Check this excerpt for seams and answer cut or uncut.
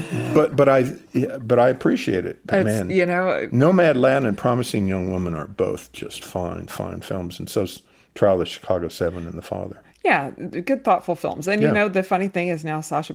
uncut